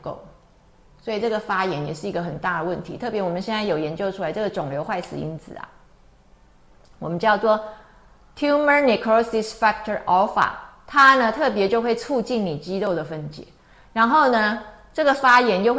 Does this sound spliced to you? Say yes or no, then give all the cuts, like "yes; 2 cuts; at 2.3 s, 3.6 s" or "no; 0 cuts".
no; 0 cuts